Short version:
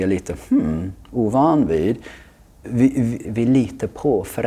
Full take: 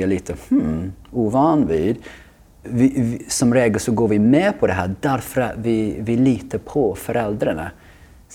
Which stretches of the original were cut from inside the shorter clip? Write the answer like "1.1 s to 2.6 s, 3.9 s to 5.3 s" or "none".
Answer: 3.2 s to 6.0 s